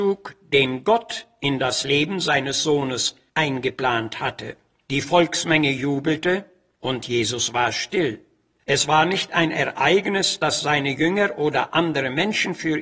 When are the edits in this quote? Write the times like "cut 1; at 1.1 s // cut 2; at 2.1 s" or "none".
cut 1; at 4.9 s // cut 2; at 8.6 s